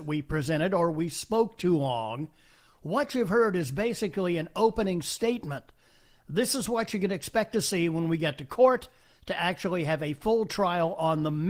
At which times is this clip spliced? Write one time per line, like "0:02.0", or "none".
none